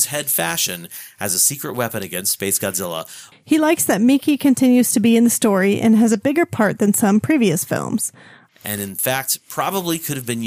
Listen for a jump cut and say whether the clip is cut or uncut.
cut